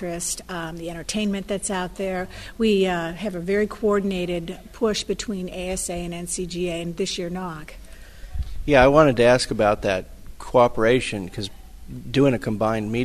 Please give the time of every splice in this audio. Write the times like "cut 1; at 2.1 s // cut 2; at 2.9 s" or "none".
none